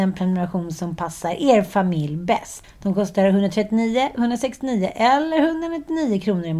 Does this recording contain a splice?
yes; 1 cut; at 2.6 s

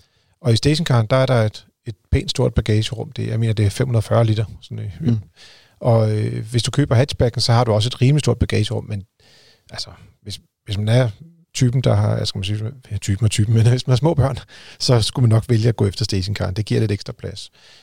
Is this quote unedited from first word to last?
yes; 0 cuts

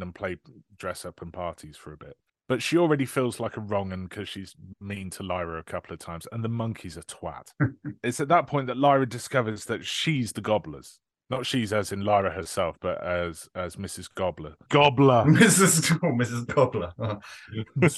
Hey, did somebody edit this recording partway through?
yes; 1 cut; at 14.7 s

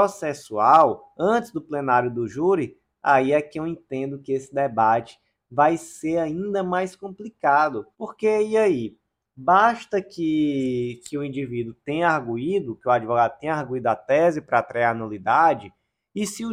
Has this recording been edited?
yes; 1 cut; at 7.9 s

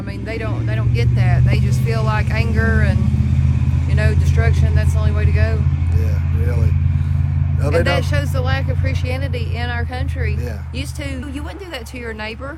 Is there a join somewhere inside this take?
yes; 1 cut; at 11.2 s

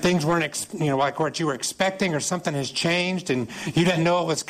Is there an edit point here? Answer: no; 0 cuts

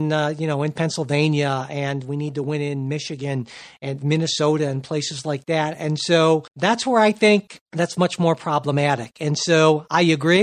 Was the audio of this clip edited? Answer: yes; 2 cuts; at 6.5 s, 7.6 s

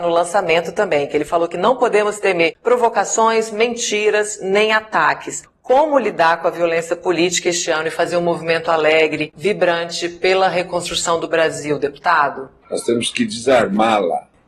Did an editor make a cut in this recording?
yes; 1 cut; at 12.6 s

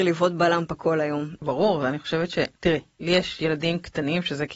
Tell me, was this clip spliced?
yes; 2 cuts; at 1.4 s, 2.6 s

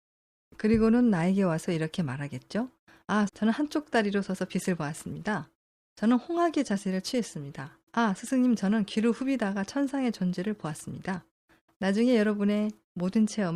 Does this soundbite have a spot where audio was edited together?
yes; 3 cuts; at 3.3 s, 7.9 s, 11.7 s

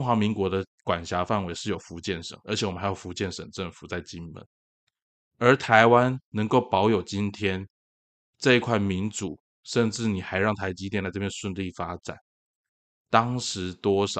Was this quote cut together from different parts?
yes; 1 cut; at 5.3 s

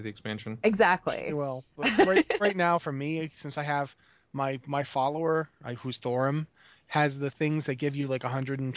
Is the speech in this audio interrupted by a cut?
no; 0 cuts

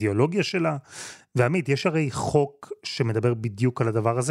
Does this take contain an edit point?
no; 0 cuts

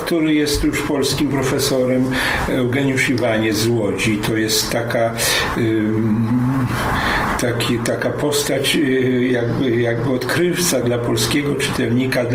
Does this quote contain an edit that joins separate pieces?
yes; 1 cut; at 10.8 s

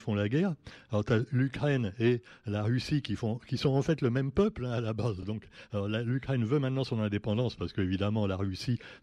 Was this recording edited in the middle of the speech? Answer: no; 0 cuts

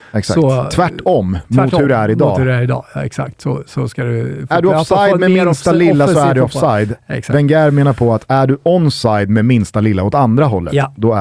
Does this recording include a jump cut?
no; 0 cuts

